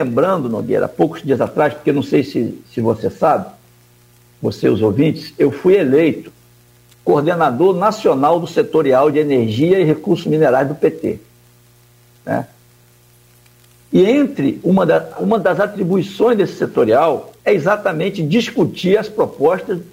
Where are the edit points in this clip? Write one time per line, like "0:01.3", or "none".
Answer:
0:15.2
0:17.4